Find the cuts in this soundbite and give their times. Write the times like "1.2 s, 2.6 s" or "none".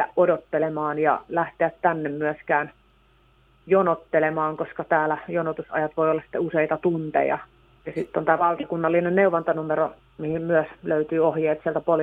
7.8 s